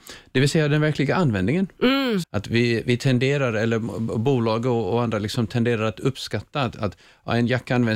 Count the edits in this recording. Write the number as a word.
one